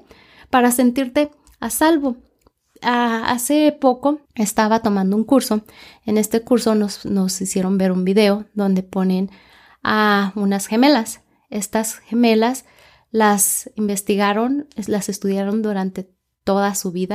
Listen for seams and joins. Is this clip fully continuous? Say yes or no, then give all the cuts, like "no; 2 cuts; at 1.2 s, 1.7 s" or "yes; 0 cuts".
no; 1 cut; at 4.3 s